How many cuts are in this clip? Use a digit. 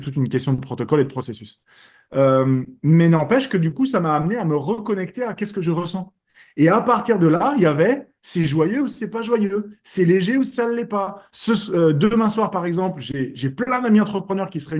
0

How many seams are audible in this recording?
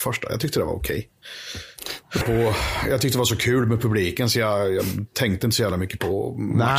1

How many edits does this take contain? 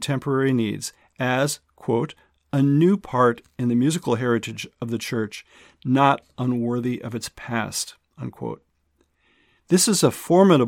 0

